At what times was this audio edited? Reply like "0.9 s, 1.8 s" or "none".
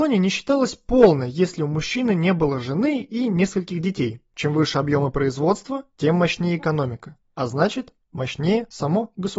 4.3 s